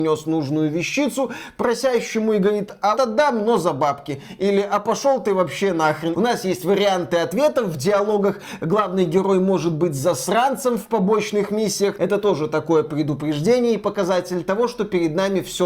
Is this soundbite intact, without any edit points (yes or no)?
no